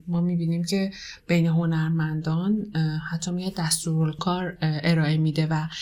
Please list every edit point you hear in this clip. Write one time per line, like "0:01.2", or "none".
0:04.2